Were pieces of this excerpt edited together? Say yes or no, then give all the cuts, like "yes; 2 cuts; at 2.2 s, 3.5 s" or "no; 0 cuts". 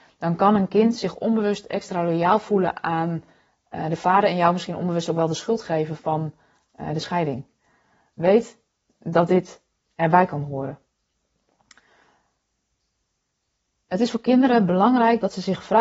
no; 0 cuts